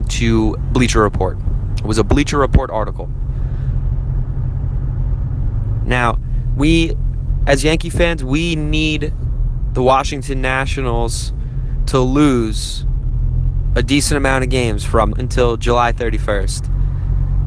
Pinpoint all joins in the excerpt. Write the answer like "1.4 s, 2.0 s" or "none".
5.8 s, 15.1 s